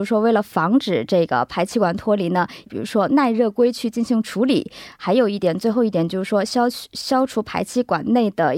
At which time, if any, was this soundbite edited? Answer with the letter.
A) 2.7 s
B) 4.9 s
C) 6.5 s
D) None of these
A